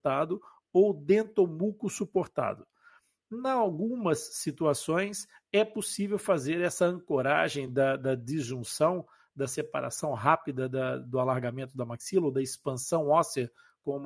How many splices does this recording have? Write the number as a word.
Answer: zero